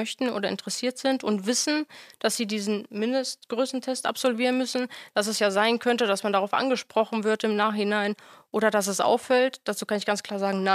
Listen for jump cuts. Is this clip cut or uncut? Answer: uncut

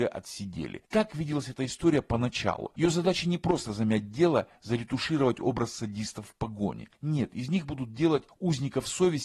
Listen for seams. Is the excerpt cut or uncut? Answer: cut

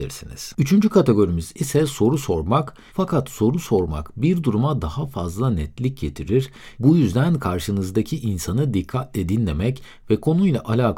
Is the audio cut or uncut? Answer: cut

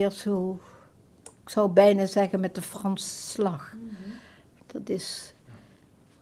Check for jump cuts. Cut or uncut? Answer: uncut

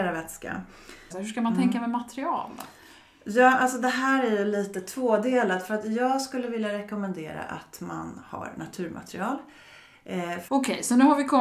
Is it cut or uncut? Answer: cut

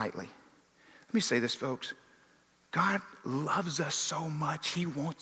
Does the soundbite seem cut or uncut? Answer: uncut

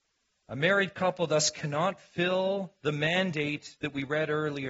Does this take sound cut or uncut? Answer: uncut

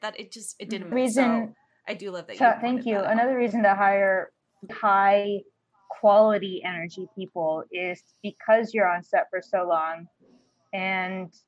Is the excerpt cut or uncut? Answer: cut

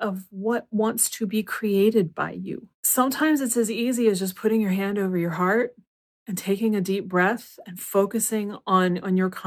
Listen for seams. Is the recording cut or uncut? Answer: cut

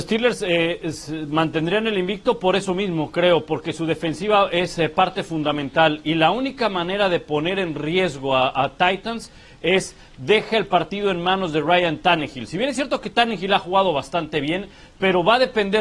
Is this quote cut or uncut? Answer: uncut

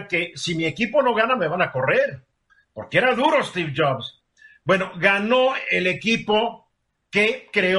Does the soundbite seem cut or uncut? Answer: uncut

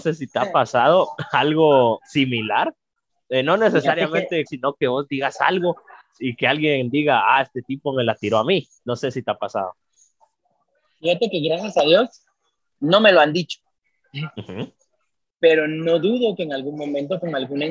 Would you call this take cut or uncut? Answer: cut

